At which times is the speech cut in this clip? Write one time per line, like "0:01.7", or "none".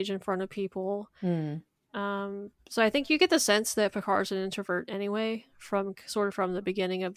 0:01.9

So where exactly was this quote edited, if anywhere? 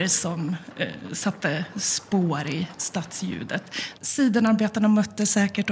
0:04.0

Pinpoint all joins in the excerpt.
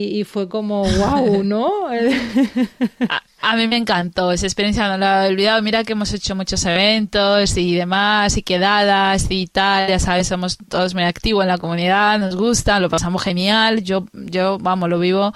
none

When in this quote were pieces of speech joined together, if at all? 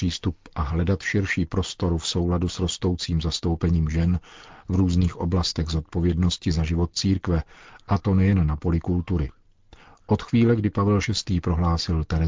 none

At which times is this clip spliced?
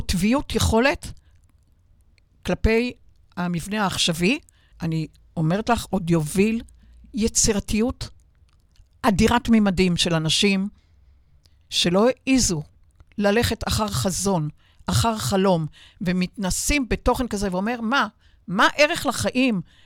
0:04.7

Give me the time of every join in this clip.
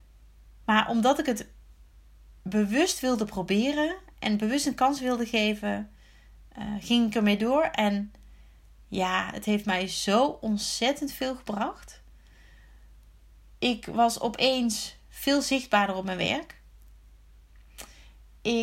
none

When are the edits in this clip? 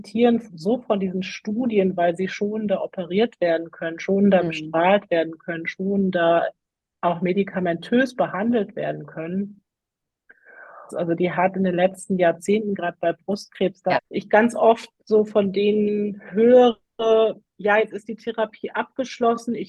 0:10.9
0:14.0

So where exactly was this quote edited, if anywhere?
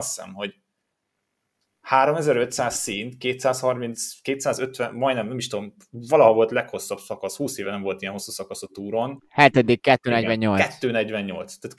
none

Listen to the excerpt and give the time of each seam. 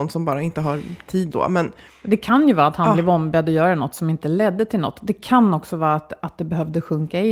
0:01.3

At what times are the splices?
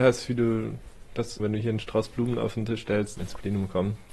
0:01.4
0:03.2

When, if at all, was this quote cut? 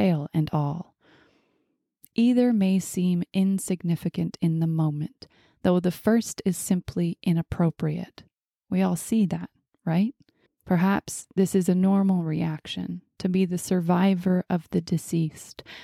0:10.5

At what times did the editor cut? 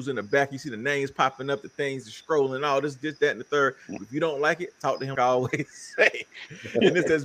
0:04.0
0:05.2

